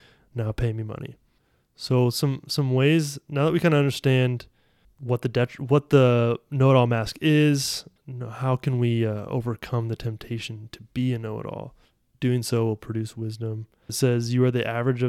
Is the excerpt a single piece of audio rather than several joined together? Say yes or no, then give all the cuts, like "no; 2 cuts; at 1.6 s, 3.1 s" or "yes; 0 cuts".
no; 3 cuts; at 8.0 s, 12.0 s, 13.9 s